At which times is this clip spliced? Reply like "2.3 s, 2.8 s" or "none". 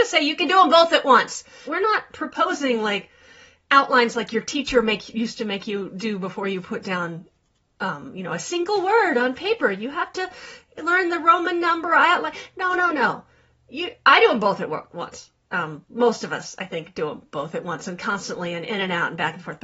1.7 s